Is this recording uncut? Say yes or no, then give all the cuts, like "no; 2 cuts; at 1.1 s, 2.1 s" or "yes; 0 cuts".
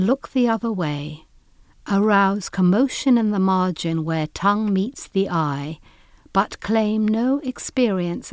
yes; 0 cuts